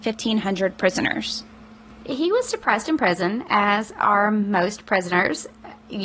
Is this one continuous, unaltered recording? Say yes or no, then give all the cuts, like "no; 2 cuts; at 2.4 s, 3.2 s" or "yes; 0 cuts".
yes; 0 cuts